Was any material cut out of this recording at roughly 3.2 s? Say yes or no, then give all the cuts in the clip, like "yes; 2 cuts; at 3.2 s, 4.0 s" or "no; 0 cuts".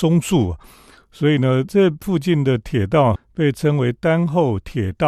yes; 1 cut; at 3.2 s